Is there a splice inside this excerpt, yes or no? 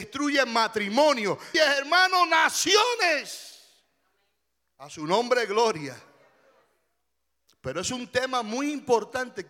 yes